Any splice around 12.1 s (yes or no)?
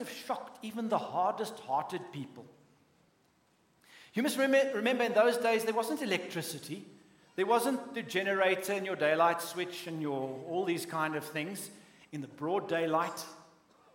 yes